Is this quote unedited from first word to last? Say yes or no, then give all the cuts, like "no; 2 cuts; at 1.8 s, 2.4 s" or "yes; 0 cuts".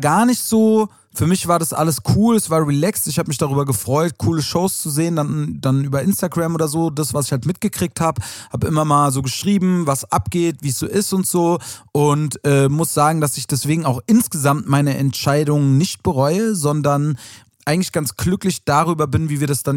yes; 0 cuts